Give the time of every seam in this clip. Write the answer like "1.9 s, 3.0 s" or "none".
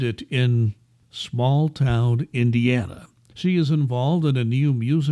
1.0 s, 3.3 s